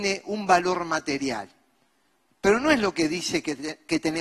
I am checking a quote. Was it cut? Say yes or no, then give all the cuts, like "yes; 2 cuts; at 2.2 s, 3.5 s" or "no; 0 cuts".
yes; 1 cut; at 2.3 s